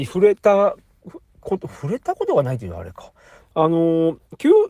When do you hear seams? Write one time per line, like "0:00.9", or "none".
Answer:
0:03.4

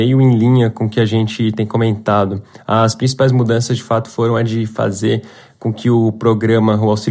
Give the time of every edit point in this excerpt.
none

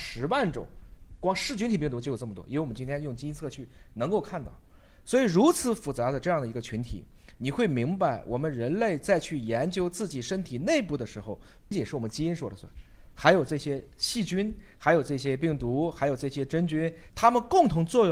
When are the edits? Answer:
0:11.7
0:17.1

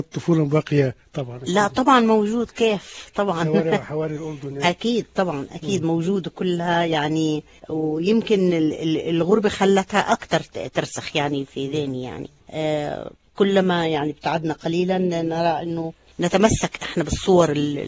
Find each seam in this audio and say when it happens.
none

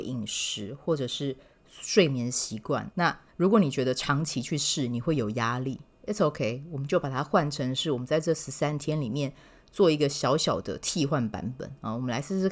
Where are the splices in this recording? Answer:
0:02.9

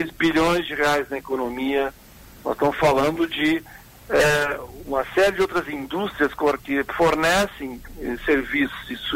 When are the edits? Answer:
none

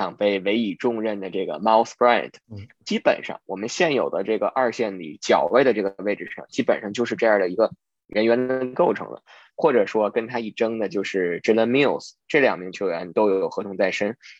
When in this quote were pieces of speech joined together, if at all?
0:09.5

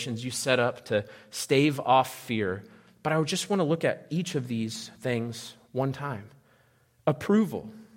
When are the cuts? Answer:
none

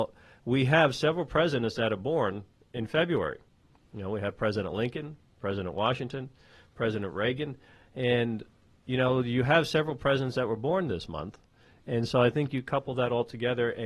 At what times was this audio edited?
none

